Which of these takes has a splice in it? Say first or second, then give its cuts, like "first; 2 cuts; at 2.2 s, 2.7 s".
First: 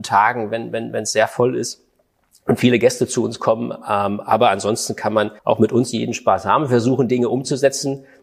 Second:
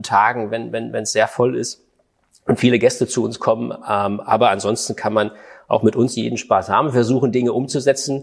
first; 1 cut; at 5.4 s